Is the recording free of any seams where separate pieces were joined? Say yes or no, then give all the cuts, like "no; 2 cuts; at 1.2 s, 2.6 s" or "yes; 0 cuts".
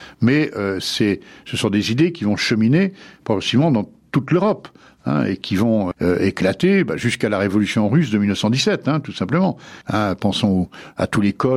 no; 2 cuts; at 5.9 s, 9.8 s